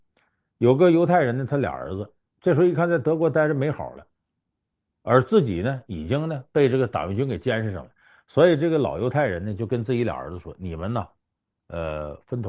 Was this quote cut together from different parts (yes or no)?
no